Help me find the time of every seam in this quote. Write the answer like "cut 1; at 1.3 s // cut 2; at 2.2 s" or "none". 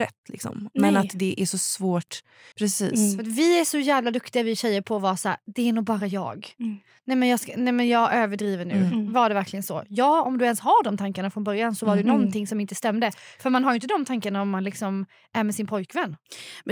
cut 1; at 2.5 s